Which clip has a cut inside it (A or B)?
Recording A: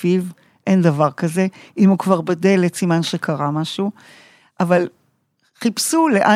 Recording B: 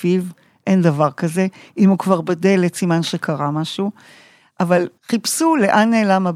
B